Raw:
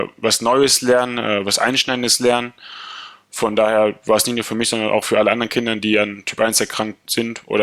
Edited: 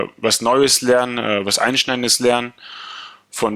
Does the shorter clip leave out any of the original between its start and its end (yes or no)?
no